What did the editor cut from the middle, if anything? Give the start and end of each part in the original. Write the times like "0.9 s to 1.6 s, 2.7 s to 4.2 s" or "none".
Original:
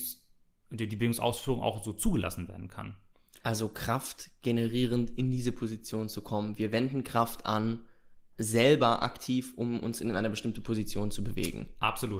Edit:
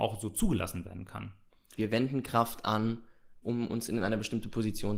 3.4 s to 6.6 s, 8.2 s to 9.5 s

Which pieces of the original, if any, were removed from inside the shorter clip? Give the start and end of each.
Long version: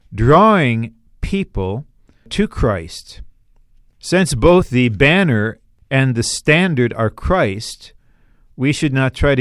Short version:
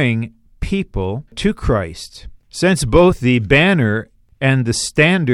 1.9 s to 2.2 s, 3.3 s to 3.9 s

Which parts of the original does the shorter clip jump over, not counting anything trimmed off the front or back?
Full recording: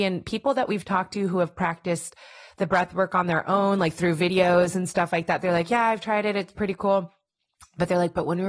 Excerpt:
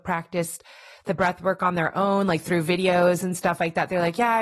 none

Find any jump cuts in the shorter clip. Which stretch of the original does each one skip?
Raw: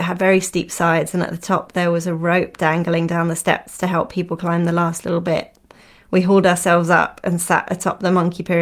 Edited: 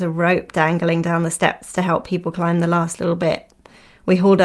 none

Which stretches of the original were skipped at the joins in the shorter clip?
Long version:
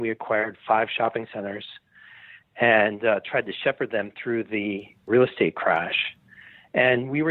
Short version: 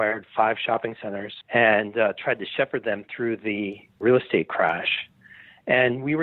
1.7 s to 2.5 s

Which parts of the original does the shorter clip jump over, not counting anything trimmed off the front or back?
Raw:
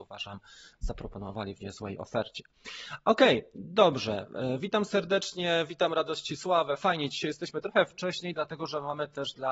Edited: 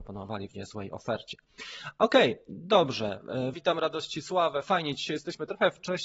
4.6 s to 5.7 s

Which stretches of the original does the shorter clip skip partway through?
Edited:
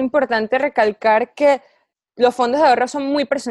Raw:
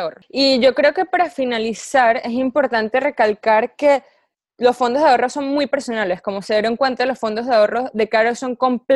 none

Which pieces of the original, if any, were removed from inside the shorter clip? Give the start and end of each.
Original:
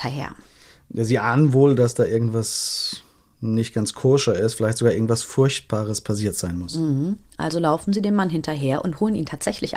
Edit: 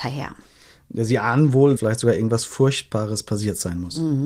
1.8 s to 4.5 s

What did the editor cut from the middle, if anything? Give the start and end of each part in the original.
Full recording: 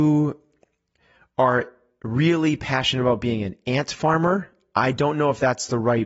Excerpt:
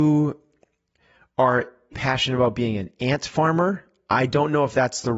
1.9 s to 2.6 s

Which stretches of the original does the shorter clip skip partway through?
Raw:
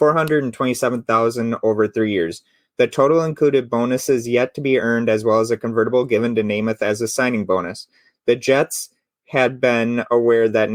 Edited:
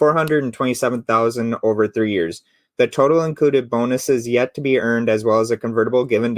none

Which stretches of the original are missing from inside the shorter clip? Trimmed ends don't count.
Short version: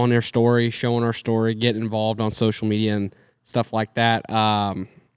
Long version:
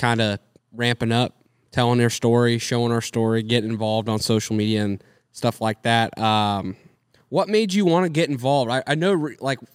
none

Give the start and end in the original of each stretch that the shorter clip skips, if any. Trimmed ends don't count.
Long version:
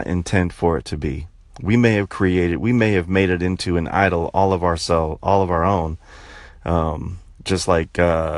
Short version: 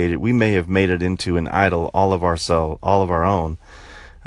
none

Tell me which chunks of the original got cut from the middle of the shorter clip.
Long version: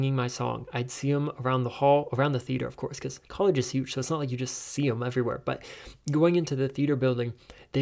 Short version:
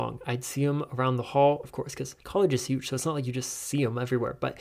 2.1 s to 2.7 s

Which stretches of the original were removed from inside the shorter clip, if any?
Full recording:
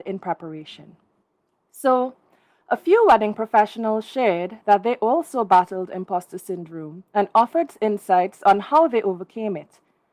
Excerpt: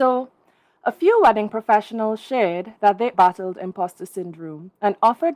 5.0 s to 5.5 s

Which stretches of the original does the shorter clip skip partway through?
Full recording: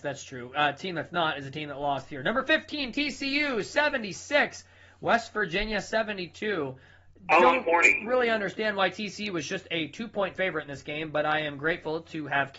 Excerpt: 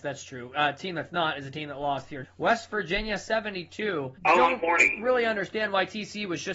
2.2 s to 4.9 s, 6.8 s to 7.2 s

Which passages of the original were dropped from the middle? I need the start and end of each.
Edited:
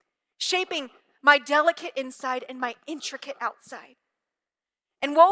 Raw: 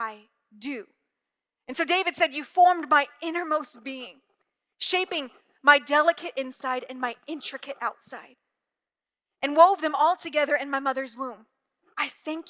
none

